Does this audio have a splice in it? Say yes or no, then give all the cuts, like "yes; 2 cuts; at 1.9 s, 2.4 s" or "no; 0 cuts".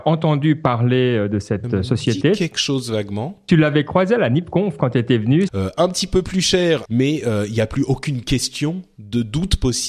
yes; 2 cuts; at 5.5 s, 6.8 s